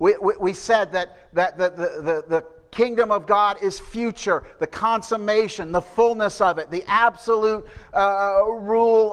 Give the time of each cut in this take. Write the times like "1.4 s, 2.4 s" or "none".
none